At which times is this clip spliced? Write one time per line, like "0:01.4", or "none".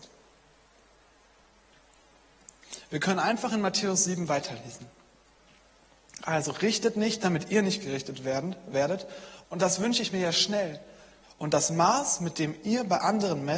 0:09.4
0:11.2